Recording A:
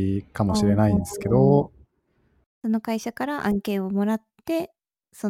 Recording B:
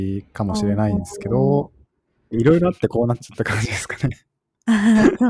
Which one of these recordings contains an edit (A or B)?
B